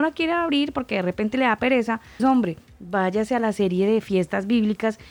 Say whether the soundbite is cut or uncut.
cut